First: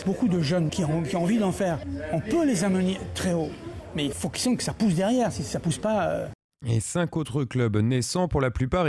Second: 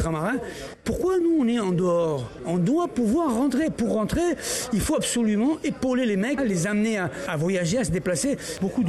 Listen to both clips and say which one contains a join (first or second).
second